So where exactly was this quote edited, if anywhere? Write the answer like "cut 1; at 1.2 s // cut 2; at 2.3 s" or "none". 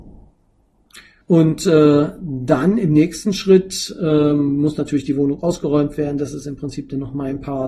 cut 1; at 1.2 s